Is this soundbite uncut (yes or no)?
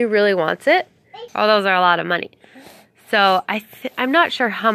no